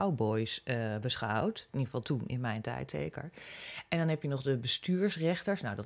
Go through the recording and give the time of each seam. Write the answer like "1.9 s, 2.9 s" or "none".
none